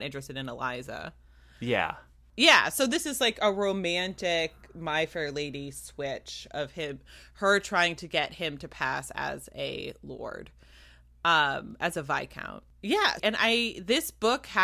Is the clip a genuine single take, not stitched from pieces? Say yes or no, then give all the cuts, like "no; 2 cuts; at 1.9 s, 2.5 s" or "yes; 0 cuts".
no; 1 cut; at 13.2 s